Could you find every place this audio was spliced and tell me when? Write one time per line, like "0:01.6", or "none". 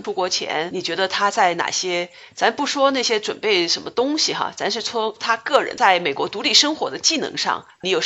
none